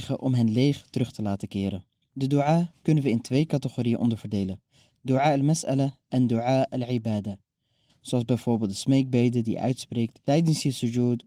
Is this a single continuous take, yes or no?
no